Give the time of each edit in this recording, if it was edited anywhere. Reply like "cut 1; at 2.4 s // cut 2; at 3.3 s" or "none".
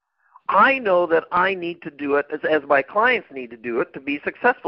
none